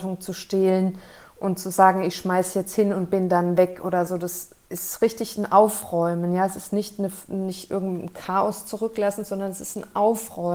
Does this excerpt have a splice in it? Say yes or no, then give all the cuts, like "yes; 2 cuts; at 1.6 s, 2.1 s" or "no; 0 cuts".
no; 0 cuts